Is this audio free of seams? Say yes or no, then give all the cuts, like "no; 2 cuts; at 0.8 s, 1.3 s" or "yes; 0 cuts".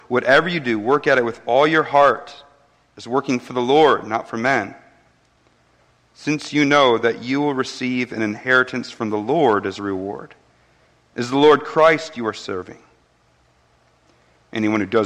yes; 0 cuts